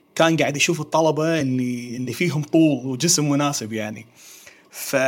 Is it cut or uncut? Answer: uncut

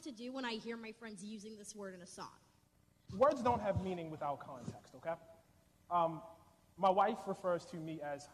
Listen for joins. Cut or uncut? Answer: cut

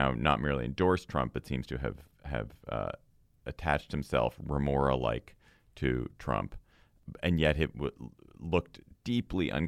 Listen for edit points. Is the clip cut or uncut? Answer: uncut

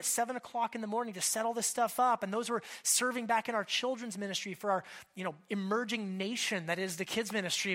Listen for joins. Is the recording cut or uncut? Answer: uncut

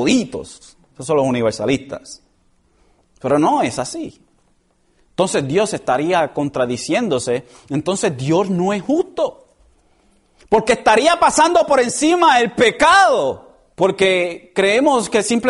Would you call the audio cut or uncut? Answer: cut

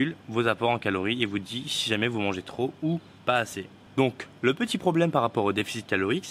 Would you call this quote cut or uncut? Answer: uncut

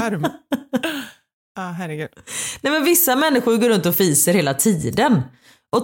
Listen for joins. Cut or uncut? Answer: uncut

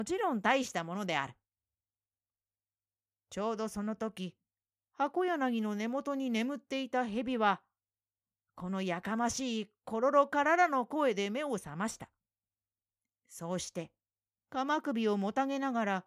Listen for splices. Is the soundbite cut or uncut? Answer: uncut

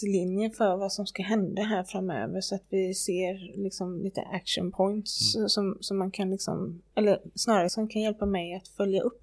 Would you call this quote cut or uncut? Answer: uncut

